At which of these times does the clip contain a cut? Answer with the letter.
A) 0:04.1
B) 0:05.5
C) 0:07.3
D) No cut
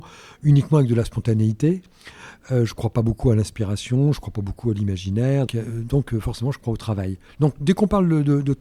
B